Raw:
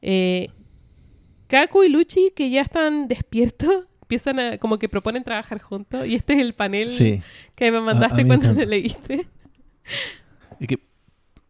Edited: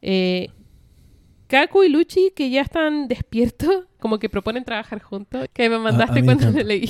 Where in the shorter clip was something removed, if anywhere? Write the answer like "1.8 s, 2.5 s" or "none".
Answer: 4.0 s, 5.5 s